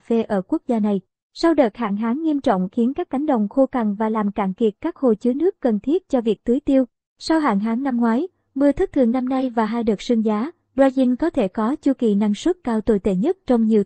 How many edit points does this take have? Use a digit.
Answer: 0